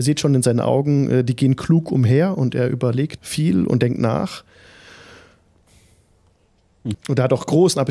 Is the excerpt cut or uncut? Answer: cut